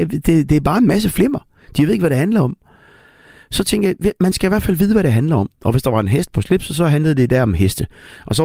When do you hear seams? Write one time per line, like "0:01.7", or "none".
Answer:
0:05.6